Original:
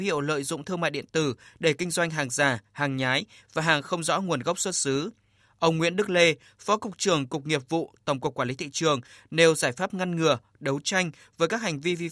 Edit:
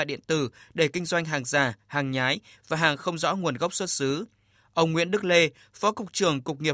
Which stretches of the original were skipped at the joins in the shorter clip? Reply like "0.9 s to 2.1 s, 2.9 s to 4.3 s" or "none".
none